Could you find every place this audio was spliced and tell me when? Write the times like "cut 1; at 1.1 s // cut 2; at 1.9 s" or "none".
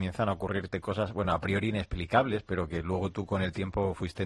none